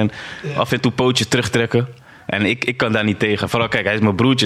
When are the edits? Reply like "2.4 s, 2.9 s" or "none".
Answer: none